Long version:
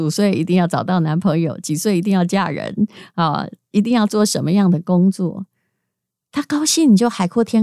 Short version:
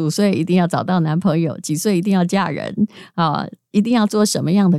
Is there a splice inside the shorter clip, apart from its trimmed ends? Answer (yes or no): no